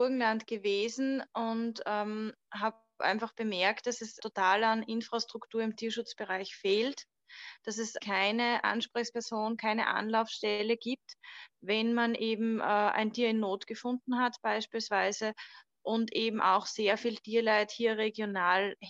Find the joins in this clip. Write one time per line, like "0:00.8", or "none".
0:04.2
0:08.0